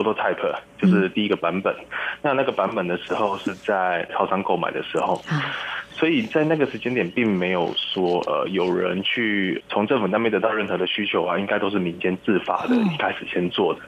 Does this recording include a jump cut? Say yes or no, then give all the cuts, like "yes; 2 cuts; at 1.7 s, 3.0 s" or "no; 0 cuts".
no; 0 cuts